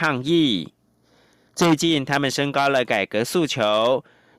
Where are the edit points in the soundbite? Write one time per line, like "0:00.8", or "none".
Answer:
0:01.5